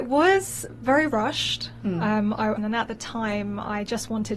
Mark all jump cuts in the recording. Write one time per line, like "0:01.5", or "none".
0:02.6